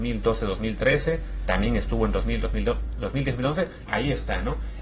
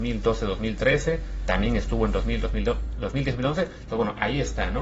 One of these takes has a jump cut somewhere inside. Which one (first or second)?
first